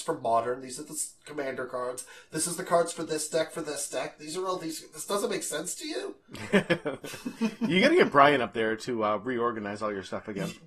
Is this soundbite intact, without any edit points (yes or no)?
no